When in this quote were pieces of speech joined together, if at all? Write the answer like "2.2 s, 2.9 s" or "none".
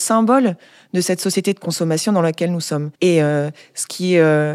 2.9 s

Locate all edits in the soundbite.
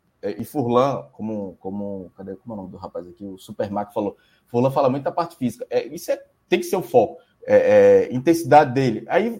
7.3 s

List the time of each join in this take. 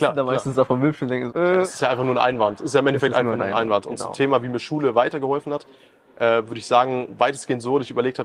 1.3 s

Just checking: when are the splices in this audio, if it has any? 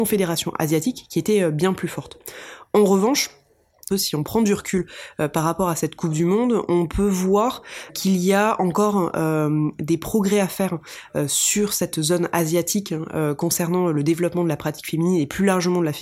3.9 s, 7.9 s

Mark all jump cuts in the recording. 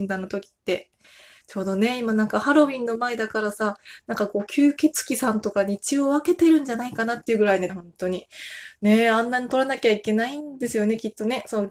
7.7 s

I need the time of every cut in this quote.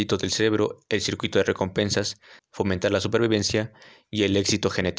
2.4 s

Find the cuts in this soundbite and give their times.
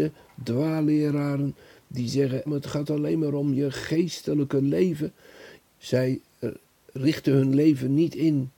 2.5 s, 5.6 s

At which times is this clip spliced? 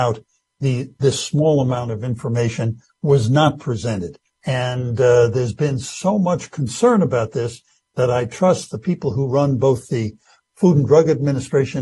4.3 s

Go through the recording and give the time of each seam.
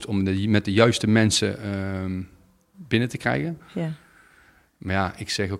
3.6 s

